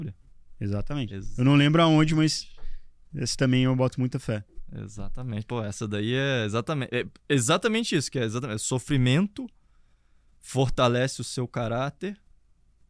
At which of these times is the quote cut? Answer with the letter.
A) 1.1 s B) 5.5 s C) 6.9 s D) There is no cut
D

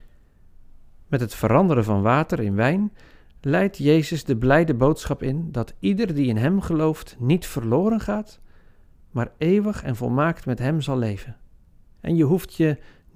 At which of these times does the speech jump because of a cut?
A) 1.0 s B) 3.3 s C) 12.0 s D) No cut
C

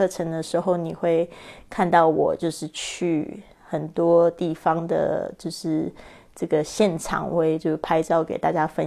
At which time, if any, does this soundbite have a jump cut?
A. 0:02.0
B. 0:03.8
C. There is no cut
C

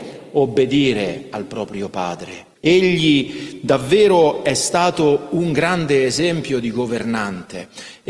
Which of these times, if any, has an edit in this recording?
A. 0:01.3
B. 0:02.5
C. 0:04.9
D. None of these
B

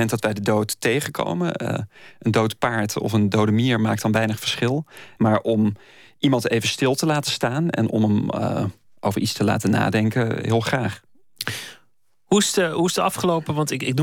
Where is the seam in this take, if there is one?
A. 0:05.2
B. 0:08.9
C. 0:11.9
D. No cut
A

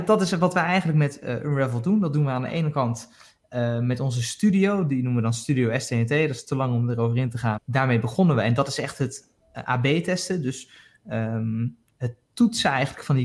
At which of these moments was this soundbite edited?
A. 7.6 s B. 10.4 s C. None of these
A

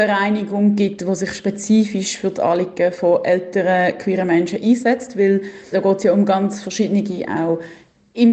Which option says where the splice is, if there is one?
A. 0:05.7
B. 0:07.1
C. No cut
A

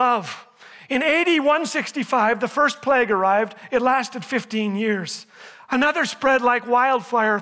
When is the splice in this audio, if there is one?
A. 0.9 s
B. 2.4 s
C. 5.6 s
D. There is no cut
D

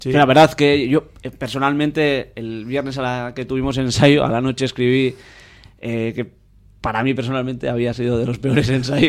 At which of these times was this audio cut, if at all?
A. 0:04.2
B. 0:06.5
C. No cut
C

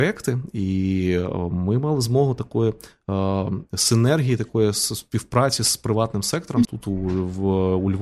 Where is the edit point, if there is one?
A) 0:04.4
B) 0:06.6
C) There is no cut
B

